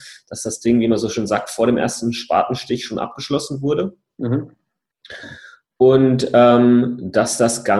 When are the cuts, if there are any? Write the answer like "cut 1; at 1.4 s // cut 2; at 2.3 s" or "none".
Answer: none